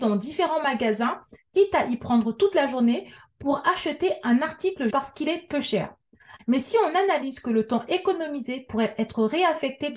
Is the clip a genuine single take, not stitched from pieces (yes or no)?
no